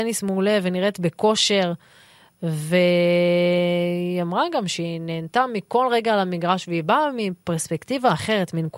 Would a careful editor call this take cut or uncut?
uncut